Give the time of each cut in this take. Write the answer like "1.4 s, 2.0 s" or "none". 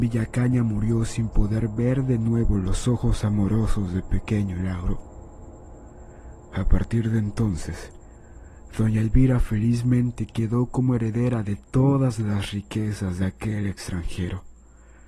none

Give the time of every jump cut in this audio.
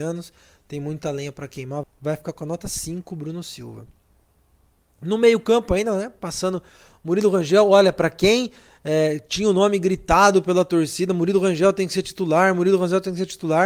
1.8 s

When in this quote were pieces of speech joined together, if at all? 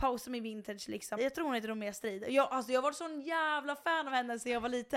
1.2 s

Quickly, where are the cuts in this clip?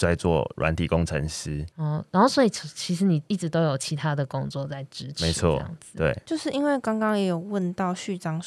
none

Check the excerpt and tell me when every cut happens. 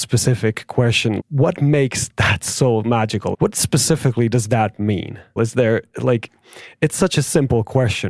1.2 s, 3.3 s, 5.4 s

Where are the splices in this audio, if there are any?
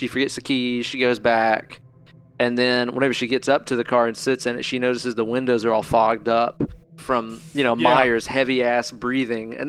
none

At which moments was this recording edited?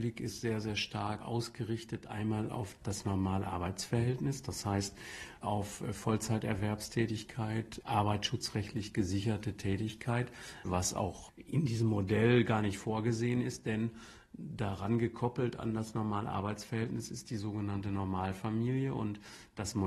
7.8 s, 10.7 s

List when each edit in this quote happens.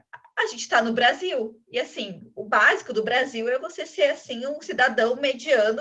none

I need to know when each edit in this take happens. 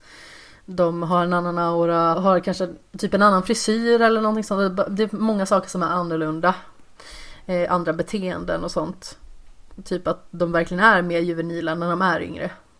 2.1 s

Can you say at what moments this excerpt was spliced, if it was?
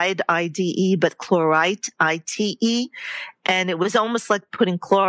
none

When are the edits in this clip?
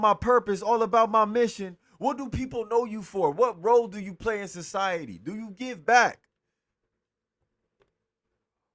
none

